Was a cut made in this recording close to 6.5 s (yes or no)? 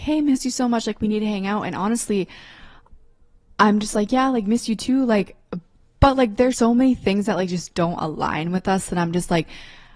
yes